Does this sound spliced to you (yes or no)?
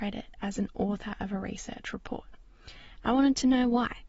yes